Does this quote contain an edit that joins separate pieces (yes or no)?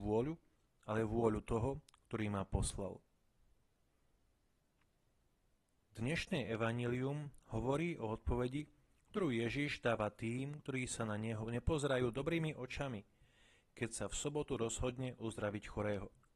no